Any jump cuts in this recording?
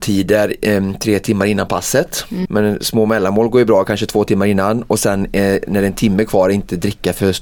yes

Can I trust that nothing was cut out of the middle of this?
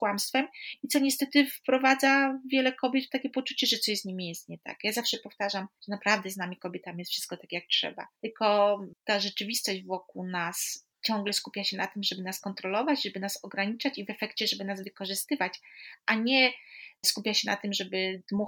yes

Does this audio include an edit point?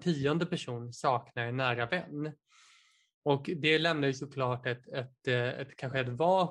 no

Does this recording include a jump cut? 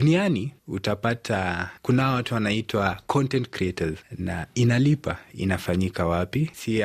yes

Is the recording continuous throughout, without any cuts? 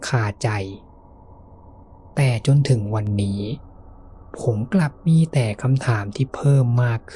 yes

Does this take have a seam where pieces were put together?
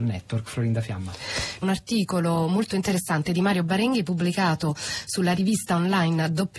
yes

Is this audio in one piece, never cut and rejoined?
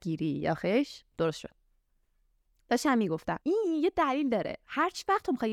no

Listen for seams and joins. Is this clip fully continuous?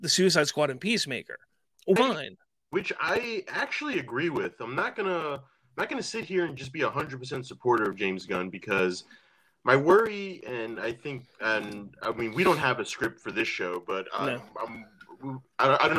no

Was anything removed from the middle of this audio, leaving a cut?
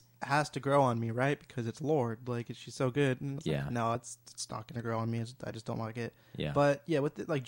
no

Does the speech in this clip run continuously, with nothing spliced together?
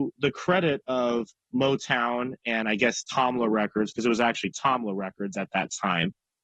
yes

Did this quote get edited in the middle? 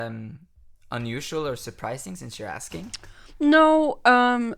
no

